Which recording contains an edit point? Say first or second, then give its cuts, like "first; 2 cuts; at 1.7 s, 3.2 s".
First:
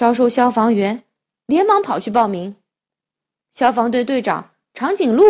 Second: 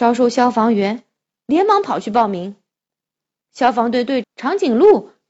second; 1 cut; at 4.2 s